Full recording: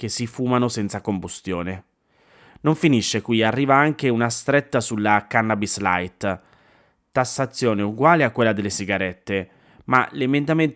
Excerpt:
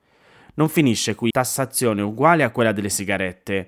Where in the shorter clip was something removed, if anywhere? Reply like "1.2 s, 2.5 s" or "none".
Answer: 1.3 s

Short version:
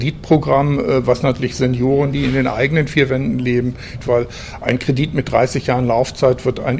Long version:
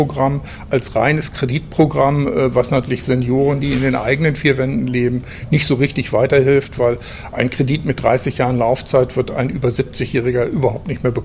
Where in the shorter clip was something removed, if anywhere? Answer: 4.0 s

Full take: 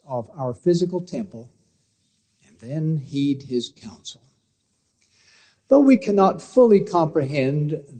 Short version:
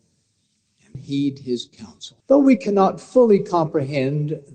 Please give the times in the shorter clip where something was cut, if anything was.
0.9 s, 2.2 s

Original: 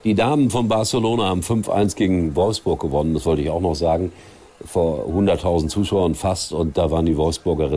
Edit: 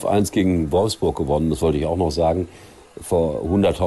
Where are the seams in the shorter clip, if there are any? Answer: none

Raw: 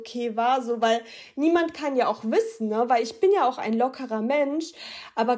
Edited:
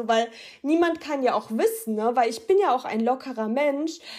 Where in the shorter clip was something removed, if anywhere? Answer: none

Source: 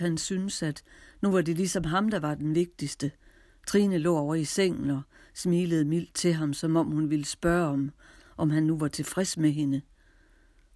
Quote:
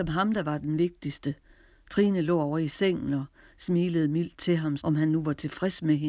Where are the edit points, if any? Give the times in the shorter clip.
4.8 s

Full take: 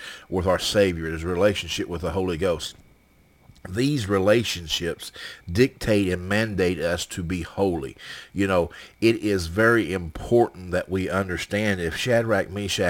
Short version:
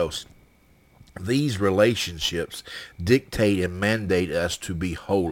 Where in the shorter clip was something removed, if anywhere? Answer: none

